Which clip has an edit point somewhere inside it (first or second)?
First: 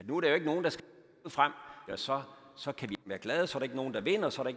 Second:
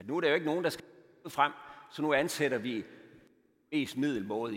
first